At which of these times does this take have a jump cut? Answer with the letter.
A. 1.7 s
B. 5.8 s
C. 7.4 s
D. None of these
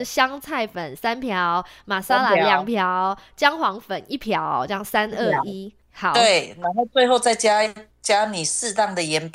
B